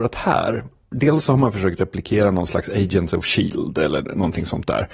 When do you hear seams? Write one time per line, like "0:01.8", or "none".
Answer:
none